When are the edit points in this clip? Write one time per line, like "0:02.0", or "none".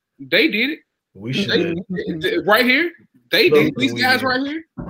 0:03.8